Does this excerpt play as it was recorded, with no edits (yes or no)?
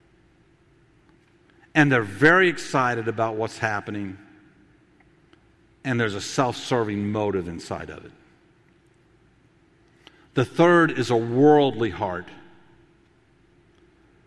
yes